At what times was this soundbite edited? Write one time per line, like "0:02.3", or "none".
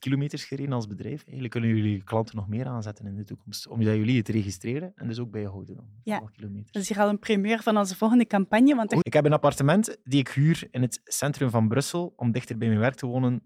0:09.0